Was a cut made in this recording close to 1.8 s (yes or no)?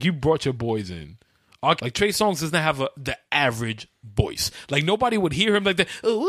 yes